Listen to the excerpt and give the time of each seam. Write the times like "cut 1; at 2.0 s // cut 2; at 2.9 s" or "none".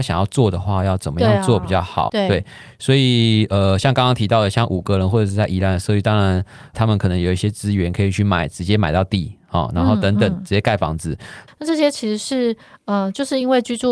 cut 1; at 2.1 s // cut 2; at 11.5 s